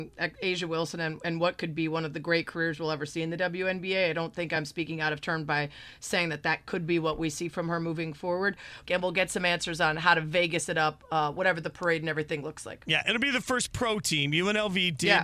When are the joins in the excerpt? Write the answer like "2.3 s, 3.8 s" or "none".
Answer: 8.9 s